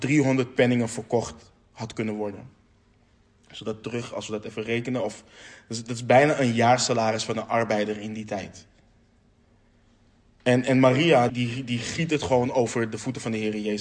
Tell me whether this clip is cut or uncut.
cut